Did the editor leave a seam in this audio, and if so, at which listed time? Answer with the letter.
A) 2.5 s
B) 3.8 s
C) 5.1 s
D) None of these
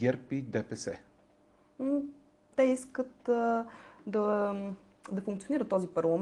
A